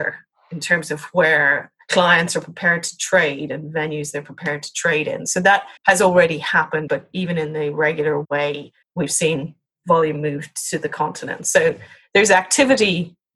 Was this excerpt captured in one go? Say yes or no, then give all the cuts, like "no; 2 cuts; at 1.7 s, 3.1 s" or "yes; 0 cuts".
no; 3 cuts; at 5.8 s, 6.9 s, 8.8 s